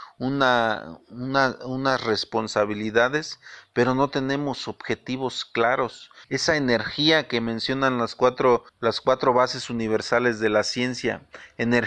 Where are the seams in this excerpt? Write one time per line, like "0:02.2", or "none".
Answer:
0:06.2
0:08.7